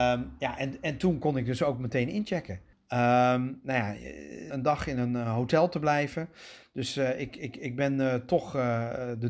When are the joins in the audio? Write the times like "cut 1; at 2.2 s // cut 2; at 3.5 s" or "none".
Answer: cut 1; at 2.7 s // cut 2; at 4.5 s